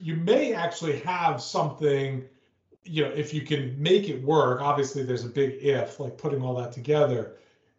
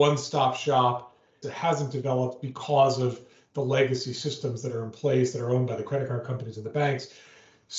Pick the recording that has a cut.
second; 1 cut; at 1.4 s

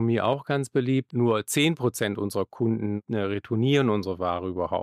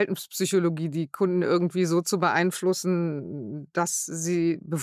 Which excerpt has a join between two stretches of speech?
first; 1 cut; at 1.1 s

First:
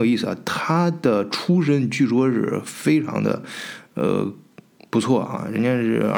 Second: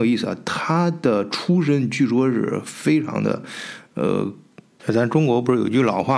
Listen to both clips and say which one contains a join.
second; 1 cut; at 4.8 s

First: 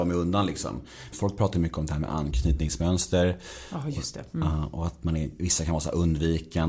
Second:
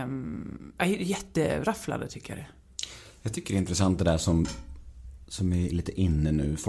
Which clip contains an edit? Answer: first; 1 cut; at 1.1 s

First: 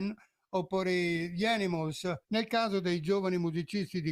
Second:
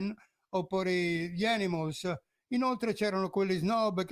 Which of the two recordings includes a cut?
first; 1 cut; at 2.2 s

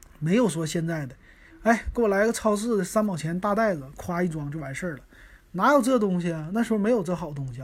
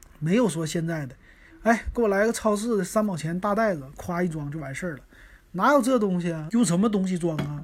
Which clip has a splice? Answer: second; 1 cut; at 6.5 s

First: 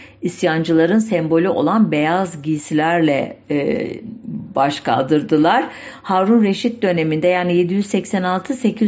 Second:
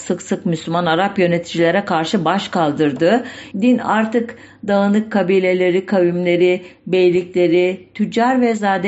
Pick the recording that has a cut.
second; 1 cut; at 3.5 s

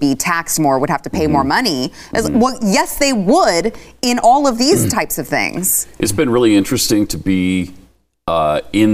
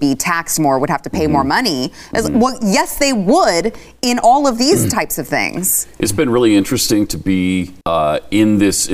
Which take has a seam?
second; 1 cut; at 7.8 s

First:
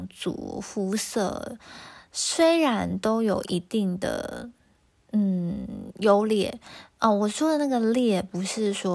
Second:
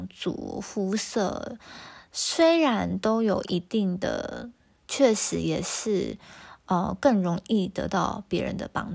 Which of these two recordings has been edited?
second; 1 cut; at 4.9 s

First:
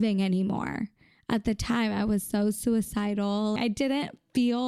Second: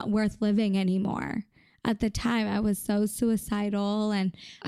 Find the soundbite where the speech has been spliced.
first; 1 cut; at 3.6 s

